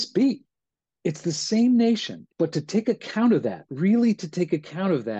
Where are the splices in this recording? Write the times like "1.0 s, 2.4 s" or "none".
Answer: 2.3 s